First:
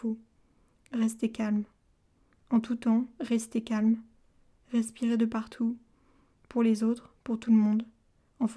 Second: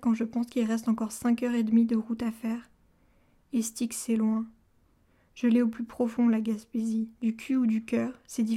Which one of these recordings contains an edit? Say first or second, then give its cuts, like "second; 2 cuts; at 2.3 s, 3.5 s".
second; 1 cut; at 7.1 s